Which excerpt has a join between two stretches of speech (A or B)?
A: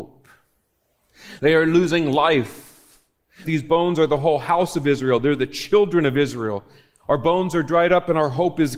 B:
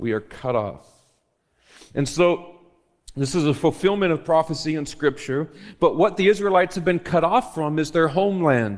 A